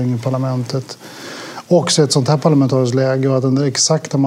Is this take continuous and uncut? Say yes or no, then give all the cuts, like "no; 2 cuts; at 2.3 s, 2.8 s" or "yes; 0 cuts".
yes; 0 cuts